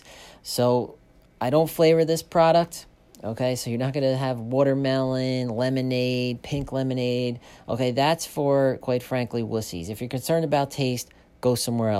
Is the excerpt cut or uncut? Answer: uncut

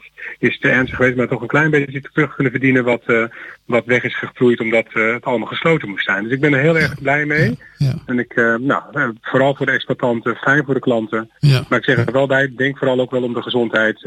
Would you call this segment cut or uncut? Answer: uncut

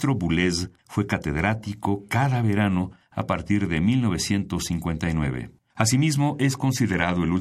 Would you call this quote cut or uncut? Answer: cut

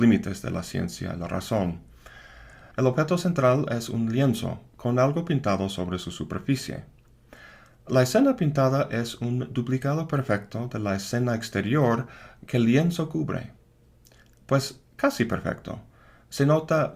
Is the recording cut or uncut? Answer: cut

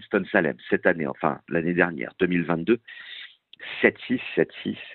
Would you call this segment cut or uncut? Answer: uncut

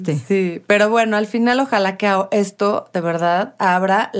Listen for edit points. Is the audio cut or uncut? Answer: uncut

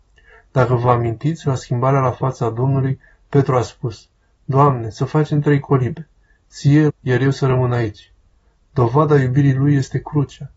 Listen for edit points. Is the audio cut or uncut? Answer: cut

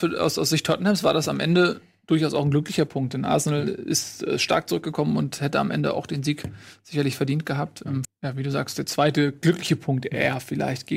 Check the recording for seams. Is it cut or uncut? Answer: cut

